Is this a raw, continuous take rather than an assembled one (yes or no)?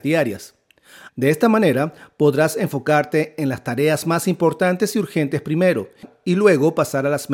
no